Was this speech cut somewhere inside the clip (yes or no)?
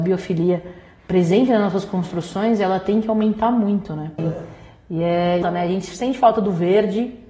yes